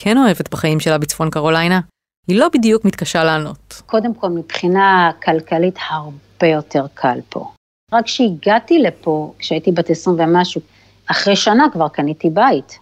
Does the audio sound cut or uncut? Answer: uncut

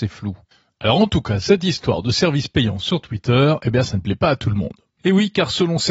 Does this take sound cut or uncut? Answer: uncut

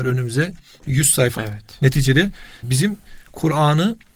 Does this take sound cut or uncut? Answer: cut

